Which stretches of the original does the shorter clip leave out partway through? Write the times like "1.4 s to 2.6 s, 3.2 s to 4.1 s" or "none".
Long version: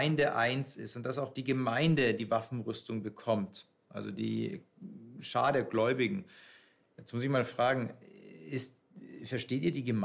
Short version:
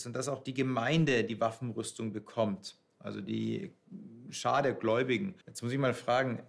6.3 s to 6.9 s